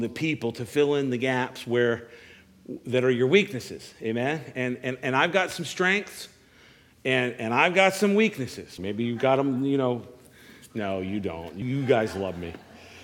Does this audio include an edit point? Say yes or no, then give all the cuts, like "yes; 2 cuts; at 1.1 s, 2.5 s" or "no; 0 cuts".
yes; 2 cuts; at 8.8 s, 11.6 s